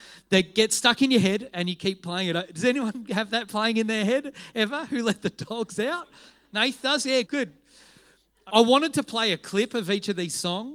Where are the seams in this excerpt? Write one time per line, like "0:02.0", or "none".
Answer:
0:07.2
0:08.5